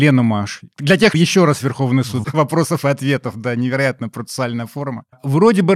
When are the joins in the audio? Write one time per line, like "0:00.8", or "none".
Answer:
0:01.1
0:02.2